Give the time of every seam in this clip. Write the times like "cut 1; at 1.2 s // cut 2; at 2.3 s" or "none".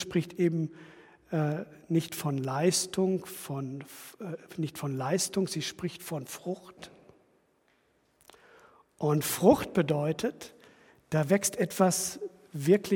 none